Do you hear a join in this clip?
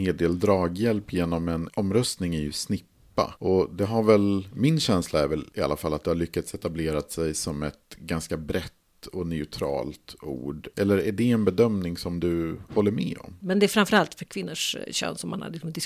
yes; 1 cut; at 13.4 s

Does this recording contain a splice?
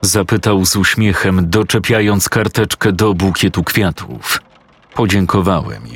yes; 1 cut; at 4.8 s

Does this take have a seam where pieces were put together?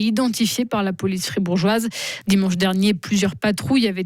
yes; 1 cut; at 2.2 s

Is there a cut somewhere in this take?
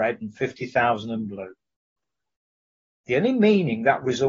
no; 0 cuts

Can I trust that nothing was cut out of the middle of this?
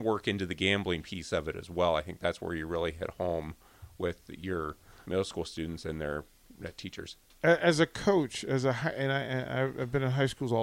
no; 1 cut; at 5.0 s

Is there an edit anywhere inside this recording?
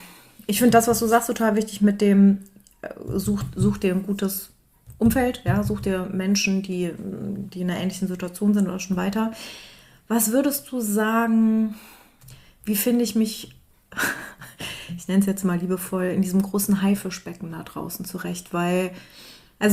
no; 0 cuts

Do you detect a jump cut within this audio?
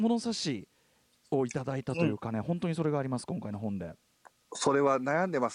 no; 0 cuts

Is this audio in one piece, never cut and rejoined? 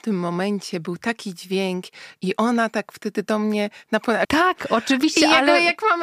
no; 1 cut; at 4.2 s

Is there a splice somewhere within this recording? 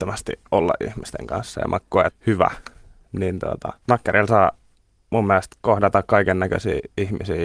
yes; 2 cuts; at 2.1 s, 3.8 s

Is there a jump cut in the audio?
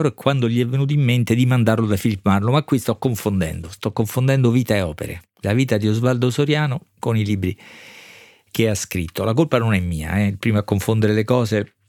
no; 0 cuts

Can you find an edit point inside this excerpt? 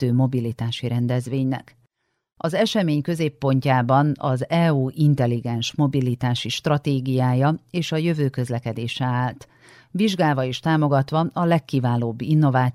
no; 0 cuts

